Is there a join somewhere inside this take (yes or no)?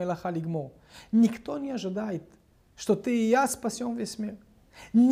no